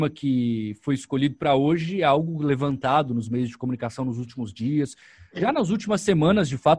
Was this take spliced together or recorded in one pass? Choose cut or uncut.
uncut